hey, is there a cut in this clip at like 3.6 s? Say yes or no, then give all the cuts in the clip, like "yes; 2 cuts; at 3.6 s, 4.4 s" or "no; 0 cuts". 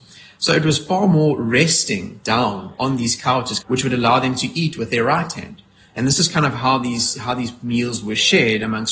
yes; 1 cut; at 3.6 s